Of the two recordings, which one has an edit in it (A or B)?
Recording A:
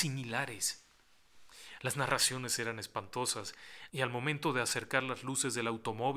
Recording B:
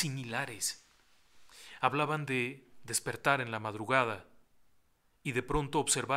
A